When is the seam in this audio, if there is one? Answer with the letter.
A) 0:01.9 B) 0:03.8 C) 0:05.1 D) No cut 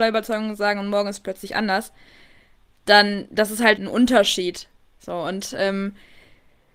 B